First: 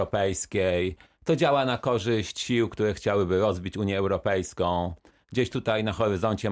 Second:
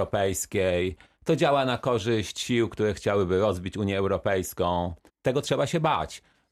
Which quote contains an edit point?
second; 1 cut; at 5.1 s

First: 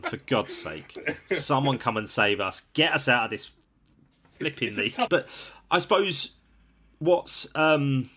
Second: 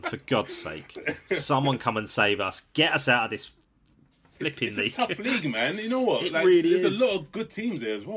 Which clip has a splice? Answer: first; 1 cut; at 5.1 s

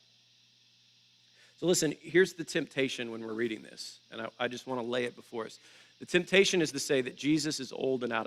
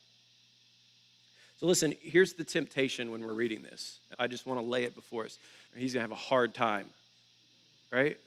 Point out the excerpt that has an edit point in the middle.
second; 2 cuts; at 4.1 s, 5.7 s

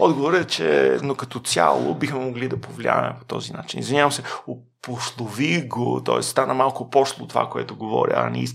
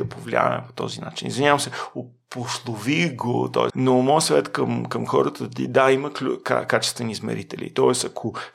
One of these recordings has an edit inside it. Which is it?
second; 1 cut; at 3.7 s

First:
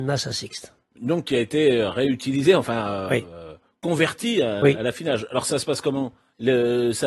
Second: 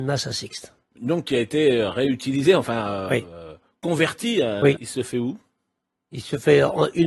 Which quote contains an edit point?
second; 1 cut; at 4.8 s

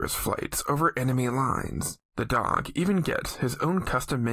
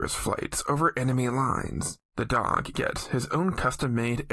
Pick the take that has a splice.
second; 1 cut; at 2.7 s

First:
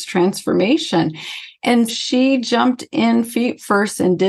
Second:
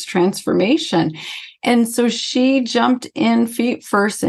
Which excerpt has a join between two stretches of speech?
first; 1 cut; at 1.9 s

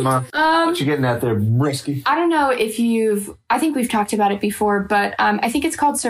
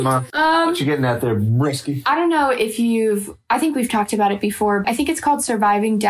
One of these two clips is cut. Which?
second; 1 cut; at 4.8 s

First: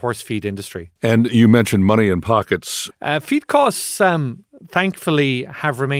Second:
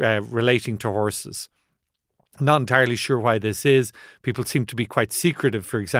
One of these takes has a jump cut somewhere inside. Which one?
first; 2 cuts; at 1.0 s, 2.9 s

